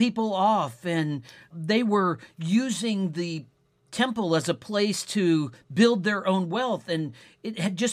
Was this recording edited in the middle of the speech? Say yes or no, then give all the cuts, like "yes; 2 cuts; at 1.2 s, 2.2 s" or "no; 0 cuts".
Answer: yes; 1 cut; at 1.5 s